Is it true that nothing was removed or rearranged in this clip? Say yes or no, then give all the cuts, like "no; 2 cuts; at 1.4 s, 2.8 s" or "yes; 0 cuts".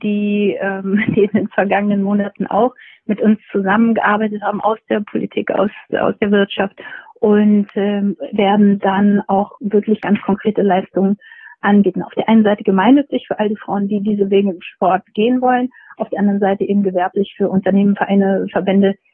yes; 0 cuts